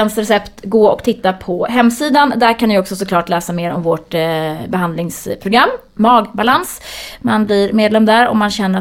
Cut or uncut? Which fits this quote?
uncut